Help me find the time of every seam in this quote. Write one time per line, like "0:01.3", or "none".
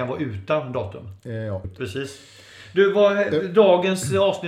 0:01.6